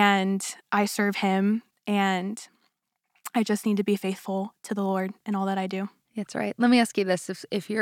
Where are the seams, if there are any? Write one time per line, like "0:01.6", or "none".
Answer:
none